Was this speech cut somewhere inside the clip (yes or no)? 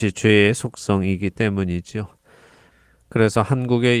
no